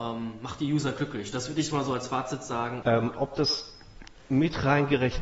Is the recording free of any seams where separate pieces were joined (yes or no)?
no